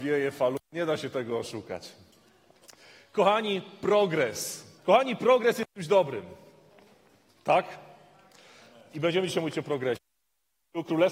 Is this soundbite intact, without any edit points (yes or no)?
no